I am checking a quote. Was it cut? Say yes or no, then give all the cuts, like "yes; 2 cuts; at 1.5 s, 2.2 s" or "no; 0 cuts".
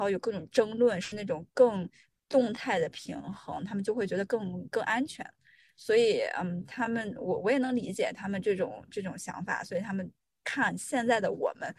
no; 0 cuts